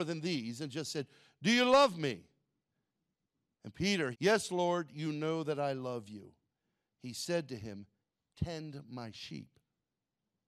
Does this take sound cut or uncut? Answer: cut